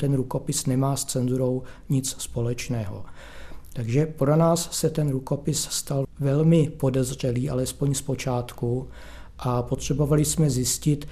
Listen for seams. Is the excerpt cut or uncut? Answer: uncut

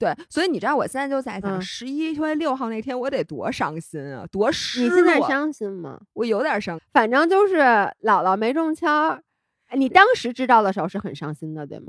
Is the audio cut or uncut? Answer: cut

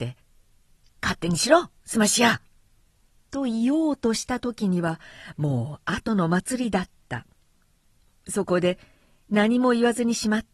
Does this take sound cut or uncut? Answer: uncut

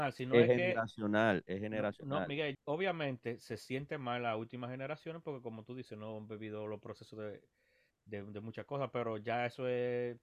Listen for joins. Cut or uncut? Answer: cut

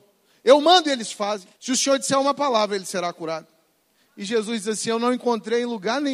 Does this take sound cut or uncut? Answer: cut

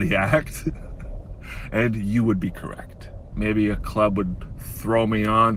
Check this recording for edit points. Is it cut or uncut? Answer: cut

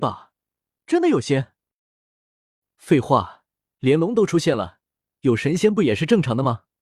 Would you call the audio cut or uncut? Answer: uncut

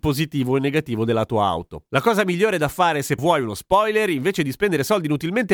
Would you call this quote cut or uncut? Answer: cut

